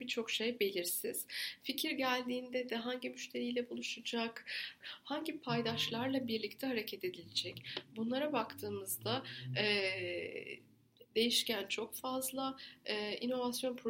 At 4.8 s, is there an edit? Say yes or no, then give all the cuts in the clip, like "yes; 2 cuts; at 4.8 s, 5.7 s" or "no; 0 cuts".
yes; 1 cut; at 4.8 s